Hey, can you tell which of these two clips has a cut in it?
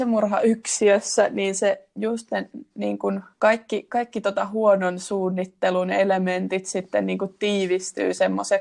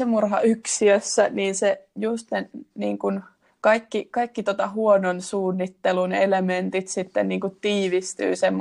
first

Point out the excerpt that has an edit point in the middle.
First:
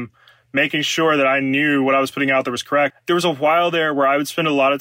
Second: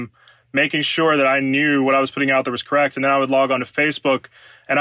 first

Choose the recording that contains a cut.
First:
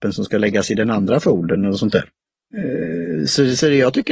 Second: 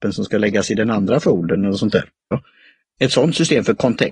second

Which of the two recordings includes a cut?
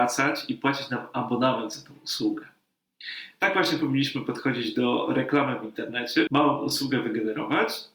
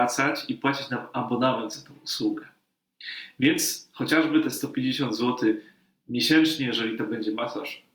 first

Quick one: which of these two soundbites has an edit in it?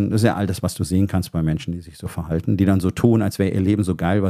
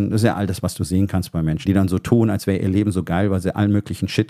second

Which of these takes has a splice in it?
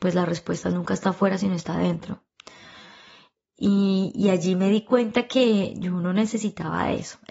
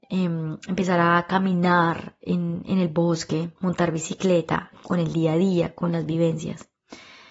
second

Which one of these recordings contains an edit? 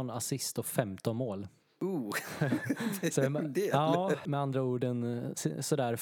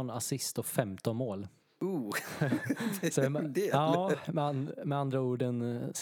first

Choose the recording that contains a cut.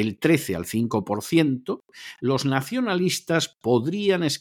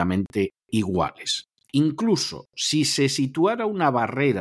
second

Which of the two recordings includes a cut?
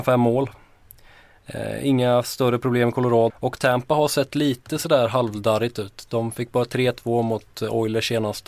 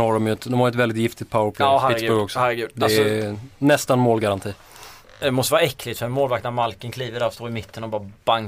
first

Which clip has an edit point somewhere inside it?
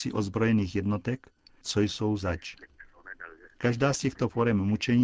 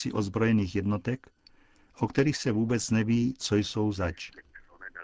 first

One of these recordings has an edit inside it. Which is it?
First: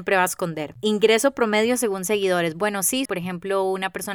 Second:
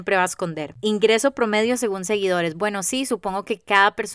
first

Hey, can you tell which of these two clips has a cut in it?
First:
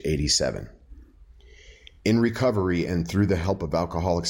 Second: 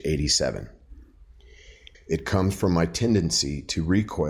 second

